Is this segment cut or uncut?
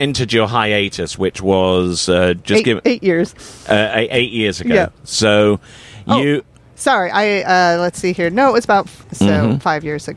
cut